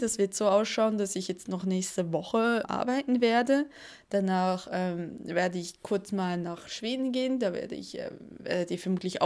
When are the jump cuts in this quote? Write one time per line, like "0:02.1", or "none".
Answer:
0:02.6